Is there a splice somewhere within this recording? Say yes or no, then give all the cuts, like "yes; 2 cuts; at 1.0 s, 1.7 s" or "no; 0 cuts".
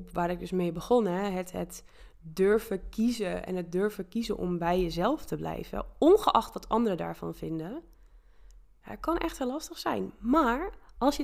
no; 0 cuts